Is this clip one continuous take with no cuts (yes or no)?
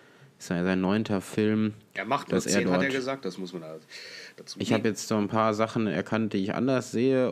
no